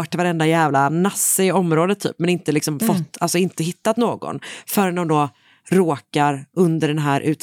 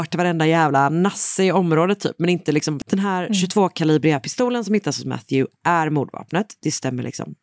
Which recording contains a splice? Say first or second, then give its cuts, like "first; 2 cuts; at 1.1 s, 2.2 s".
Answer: second; 1 cut; at 2.8 s